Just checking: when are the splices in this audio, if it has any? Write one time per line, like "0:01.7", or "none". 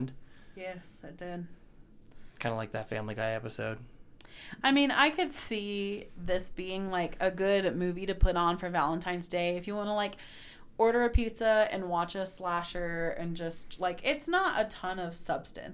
none